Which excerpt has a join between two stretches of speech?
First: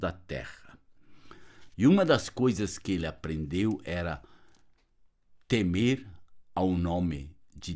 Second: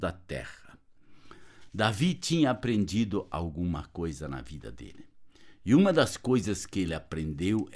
first; 1 cut; at 1.7 s

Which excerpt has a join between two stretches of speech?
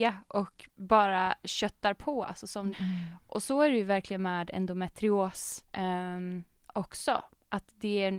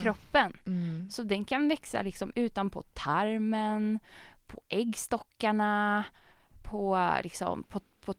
first; 2 cuts; at 2.7 s, 5.7 s

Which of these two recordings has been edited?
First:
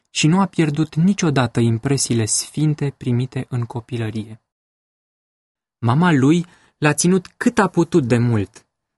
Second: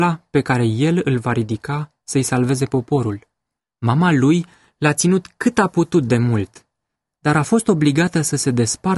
second; 1 cut; at 3.6 s

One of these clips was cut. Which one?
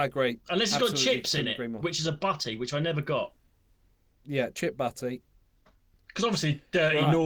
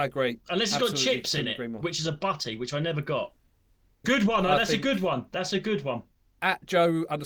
second; 1 cut; at 4.0 s

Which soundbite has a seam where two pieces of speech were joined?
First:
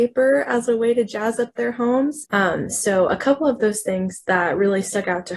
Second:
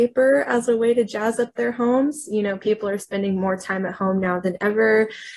first; 1 cut; at 2.2 s

